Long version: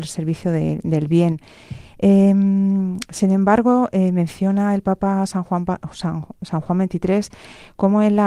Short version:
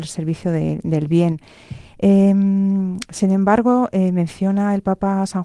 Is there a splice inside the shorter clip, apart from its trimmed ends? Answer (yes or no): no